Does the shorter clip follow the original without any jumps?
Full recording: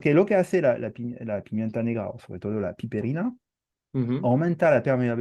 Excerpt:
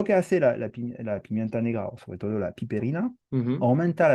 no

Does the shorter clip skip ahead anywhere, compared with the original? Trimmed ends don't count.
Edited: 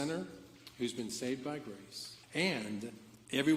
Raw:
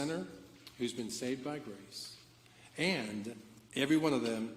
yes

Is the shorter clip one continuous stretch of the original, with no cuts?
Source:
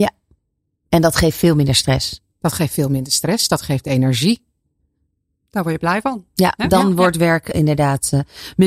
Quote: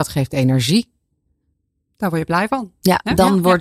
yes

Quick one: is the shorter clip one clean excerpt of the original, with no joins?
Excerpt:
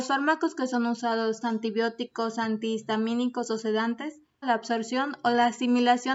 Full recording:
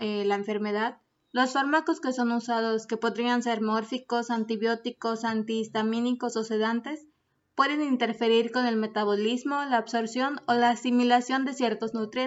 no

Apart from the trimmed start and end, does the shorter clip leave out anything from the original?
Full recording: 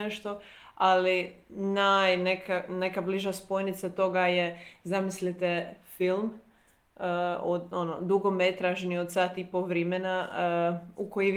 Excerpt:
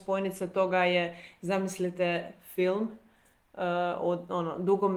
no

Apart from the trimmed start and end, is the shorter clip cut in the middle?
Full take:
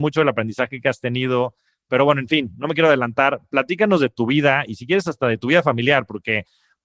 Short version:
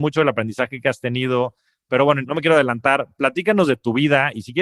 yes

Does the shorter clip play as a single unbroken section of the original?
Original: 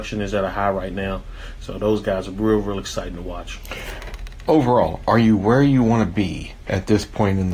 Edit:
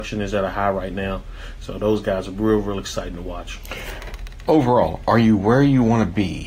yes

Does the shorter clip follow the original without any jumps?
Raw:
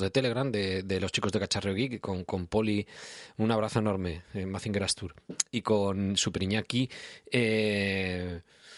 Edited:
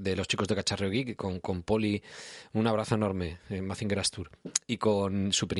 yes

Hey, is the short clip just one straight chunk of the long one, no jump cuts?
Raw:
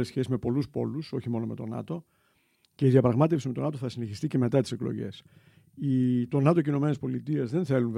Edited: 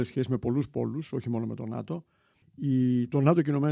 no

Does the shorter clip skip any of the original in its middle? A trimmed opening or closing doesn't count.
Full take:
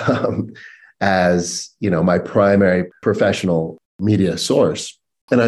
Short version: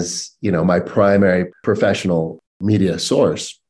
no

